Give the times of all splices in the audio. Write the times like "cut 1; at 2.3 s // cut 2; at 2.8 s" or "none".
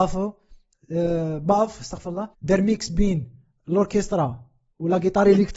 cut 1; at 2.3 s